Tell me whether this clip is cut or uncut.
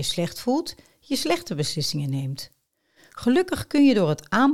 uncut